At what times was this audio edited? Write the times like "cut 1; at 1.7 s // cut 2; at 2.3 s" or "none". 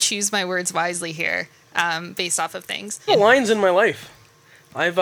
cut 1; at 3.1 s